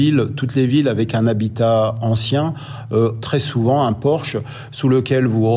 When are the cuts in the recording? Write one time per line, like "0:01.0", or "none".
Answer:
0:03.2